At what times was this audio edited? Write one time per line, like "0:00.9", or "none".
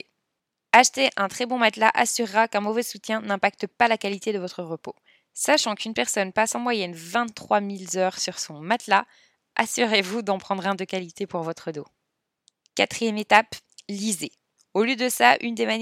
0:14.6